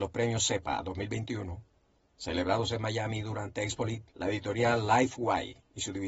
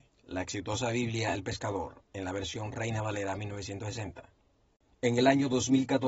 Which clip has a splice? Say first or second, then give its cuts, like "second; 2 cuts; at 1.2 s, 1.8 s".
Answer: first; 1 cut; at 4.1 s